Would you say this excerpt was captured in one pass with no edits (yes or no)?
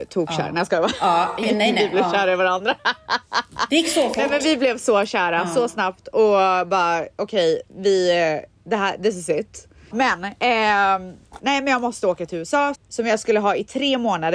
no